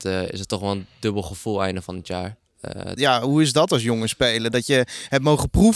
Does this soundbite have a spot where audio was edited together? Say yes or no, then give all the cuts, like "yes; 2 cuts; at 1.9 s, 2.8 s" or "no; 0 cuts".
yes; 1 cut; at 3.0 s